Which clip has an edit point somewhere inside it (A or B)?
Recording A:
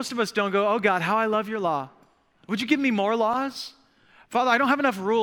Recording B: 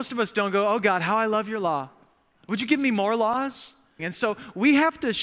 B